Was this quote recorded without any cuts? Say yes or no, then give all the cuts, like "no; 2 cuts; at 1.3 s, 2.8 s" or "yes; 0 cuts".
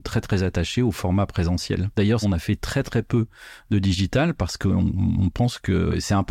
no; 1 cut; at 2.2 s